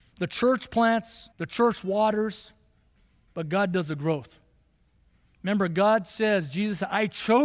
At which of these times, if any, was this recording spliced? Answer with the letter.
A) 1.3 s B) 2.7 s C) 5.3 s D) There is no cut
A